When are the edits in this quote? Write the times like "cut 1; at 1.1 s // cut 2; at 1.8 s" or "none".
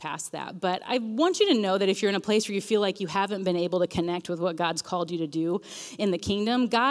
none